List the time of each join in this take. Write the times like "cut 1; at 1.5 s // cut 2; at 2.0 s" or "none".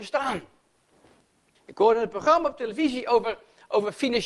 cut 1; at 1.5 s